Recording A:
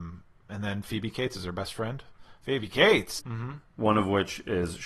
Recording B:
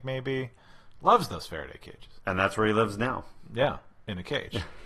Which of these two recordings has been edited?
A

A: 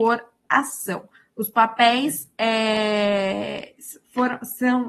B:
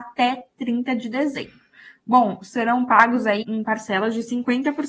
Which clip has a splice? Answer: B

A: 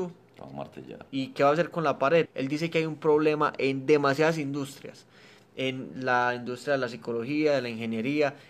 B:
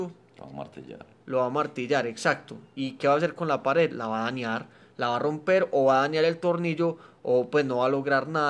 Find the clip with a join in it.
A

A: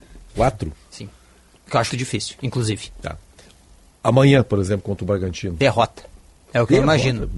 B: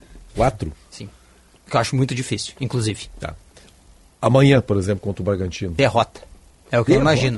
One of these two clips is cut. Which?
A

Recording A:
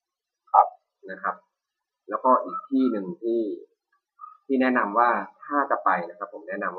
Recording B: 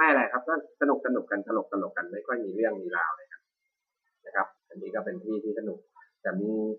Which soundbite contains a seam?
B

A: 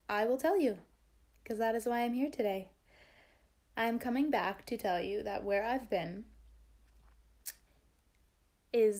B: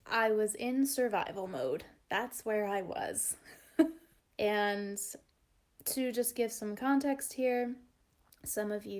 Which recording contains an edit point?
B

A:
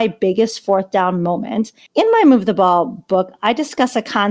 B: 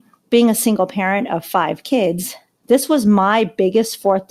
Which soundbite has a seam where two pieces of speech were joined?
A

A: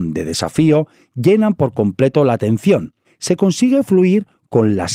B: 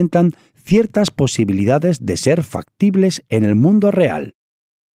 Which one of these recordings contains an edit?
A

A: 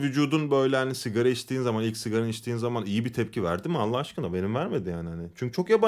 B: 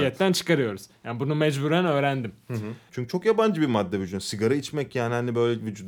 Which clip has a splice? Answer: B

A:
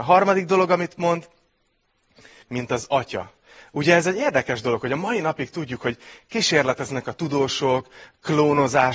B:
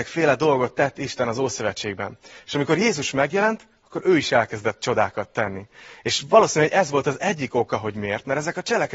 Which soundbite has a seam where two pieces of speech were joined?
A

